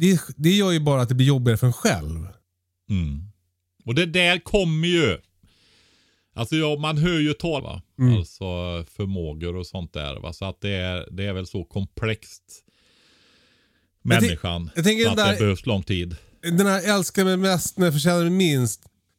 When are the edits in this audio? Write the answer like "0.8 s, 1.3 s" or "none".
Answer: 7.6 s